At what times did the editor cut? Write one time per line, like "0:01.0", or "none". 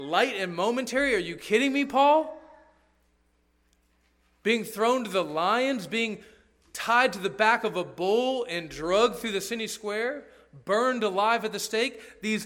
none